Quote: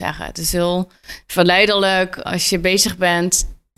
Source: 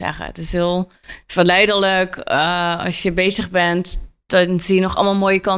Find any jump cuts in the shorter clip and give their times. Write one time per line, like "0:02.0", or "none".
0:02.2